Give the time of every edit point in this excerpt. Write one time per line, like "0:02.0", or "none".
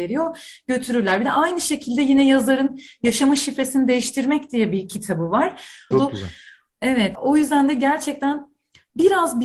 0:05.9
0:07.1